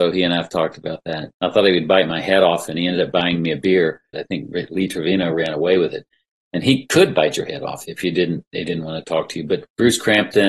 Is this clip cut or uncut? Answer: cut